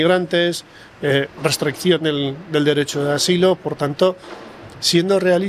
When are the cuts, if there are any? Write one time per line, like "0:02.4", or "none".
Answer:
none